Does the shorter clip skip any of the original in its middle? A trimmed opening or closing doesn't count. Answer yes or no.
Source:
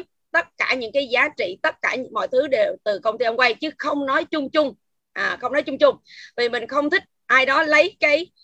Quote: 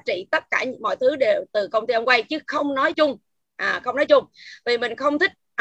yes